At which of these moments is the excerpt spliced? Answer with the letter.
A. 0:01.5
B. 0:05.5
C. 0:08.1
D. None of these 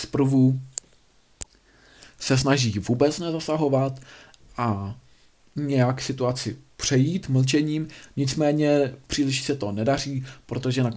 D